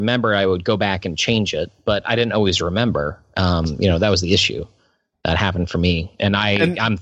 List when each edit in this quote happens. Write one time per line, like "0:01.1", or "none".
none